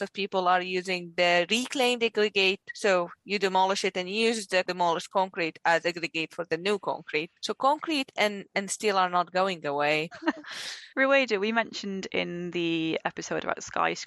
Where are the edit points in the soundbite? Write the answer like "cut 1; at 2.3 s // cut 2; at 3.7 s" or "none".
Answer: cut 1; at 10.1 s